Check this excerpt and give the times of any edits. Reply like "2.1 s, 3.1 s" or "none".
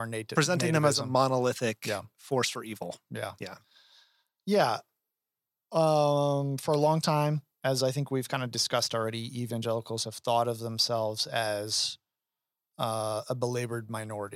none